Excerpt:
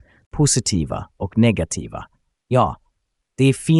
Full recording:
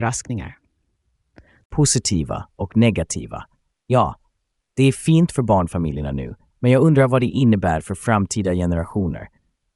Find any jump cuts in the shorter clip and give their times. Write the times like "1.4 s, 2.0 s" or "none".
none